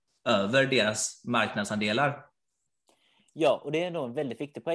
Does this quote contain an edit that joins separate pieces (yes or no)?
no